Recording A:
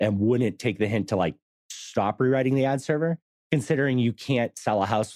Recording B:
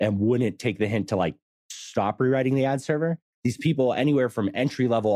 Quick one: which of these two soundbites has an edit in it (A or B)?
B